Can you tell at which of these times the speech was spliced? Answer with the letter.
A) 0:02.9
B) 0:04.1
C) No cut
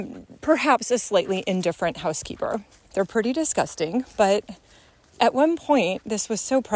A